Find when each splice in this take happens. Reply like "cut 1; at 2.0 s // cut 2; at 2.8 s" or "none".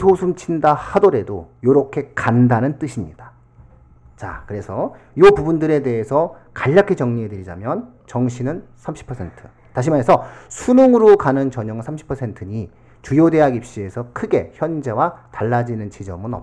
none